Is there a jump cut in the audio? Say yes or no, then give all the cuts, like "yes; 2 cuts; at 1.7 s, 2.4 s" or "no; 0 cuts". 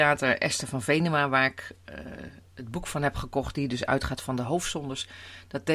no; 0 cuts